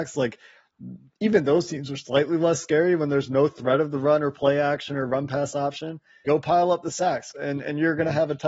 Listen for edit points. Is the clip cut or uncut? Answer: cut